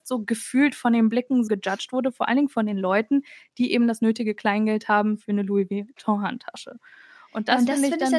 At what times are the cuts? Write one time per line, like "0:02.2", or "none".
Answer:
0:01.5